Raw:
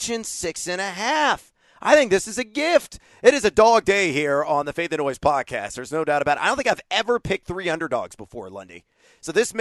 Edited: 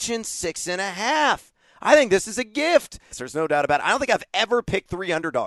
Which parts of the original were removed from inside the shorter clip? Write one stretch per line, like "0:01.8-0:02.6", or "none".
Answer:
0:03.1-0:05.7